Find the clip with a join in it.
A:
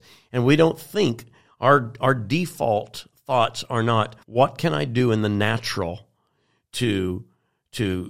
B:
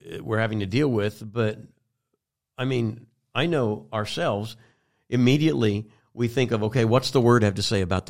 A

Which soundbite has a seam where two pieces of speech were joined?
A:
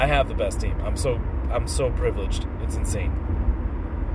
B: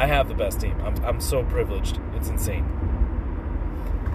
B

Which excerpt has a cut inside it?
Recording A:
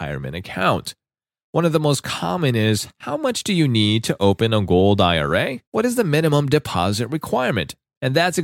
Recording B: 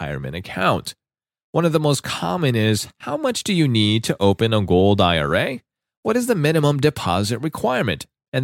A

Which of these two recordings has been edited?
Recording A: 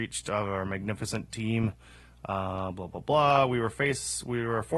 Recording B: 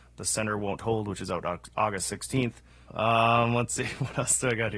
B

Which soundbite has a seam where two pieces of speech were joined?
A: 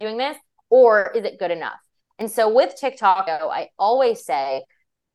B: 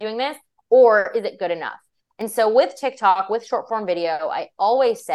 A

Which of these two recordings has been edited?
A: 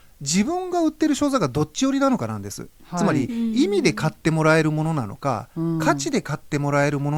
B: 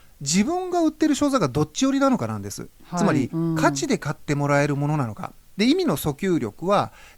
B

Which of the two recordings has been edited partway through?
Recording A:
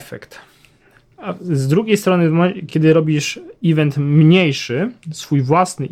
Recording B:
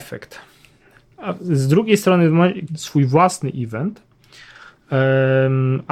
B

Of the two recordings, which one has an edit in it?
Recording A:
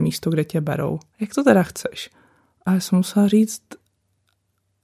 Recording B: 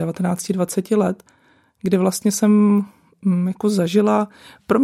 A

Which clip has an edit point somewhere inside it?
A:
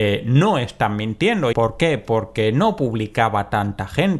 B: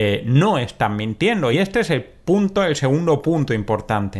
A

